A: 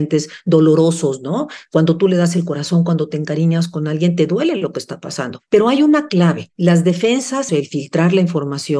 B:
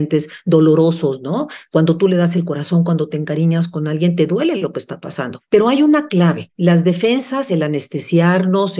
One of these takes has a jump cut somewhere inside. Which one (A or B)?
A